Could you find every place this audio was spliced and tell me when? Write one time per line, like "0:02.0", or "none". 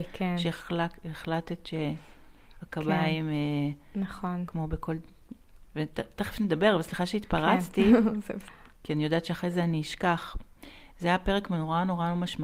0:05.7
0:08.5